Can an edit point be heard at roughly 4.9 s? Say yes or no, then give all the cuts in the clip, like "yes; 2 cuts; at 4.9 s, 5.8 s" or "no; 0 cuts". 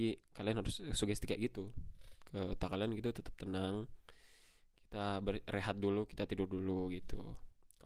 no; 1 cut; at 6.1 s